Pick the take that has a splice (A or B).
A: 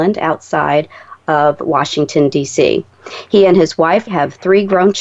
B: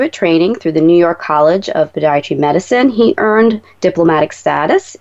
A